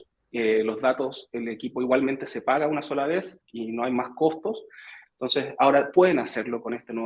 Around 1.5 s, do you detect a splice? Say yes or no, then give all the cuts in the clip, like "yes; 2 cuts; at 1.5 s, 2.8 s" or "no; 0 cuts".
no; 1 cut; at 5.1 s